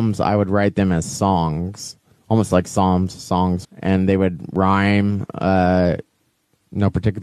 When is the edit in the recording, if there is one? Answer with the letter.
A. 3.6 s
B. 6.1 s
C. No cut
A